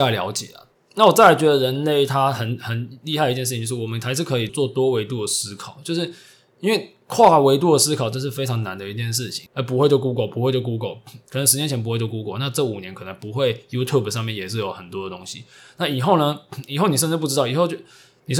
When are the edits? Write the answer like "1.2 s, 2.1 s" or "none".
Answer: 4.5 s, 9.5 s

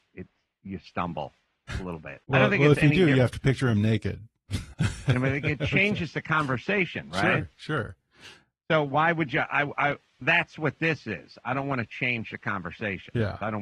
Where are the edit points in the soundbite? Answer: 2.2 s, 4.7 s, 10.2 s

